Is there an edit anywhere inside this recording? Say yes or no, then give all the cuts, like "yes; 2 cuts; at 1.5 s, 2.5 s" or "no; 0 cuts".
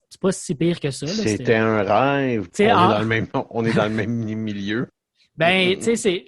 yes; 1 cut; at 2.5 s